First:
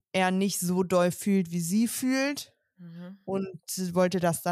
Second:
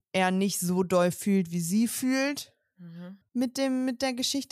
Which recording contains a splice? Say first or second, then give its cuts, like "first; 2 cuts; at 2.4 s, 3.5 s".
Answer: second; 1 cut; at 3.2 s